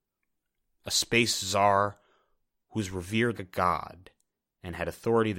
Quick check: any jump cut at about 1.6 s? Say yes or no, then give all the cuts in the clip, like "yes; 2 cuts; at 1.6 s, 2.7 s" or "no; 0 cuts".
no; 1 cut; at 3.3 s